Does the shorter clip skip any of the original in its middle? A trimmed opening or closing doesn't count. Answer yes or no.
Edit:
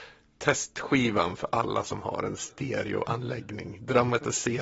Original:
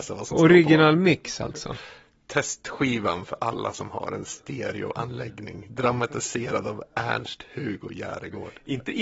no